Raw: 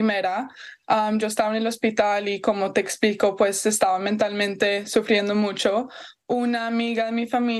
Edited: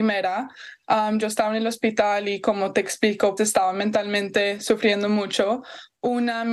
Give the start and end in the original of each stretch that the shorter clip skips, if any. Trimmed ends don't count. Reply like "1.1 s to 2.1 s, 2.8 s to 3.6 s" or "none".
3.4 s to 3.6 s